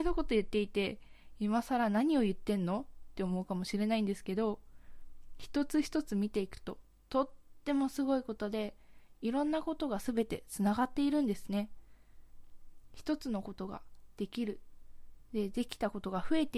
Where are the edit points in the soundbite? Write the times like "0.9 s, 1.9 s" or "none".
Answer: none